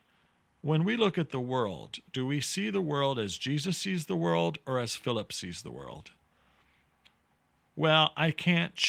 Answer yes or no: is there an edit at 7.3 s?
no